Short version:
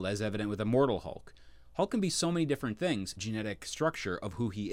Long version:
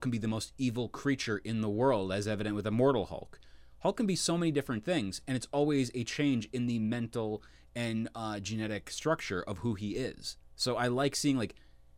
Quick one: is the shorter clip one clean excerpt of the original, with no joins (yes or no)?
no